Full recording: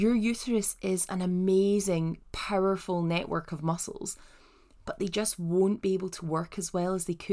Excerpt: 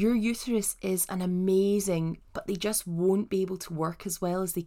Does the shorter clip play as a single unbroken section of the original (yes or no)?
no